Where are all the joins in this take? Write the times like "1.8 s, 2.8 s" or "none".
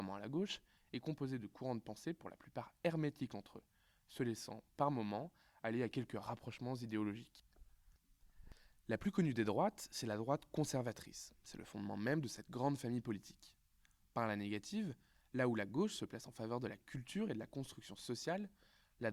none